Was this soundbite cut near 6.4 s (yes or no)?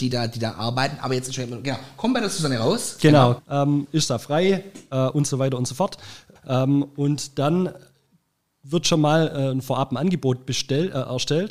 yes